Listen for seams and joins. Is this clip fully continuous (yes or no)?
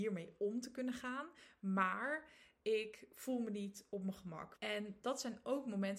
no